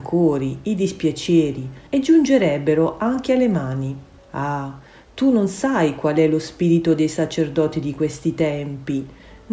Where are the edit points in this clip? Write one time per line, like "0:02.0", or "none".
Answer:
0:01.9
0:04.2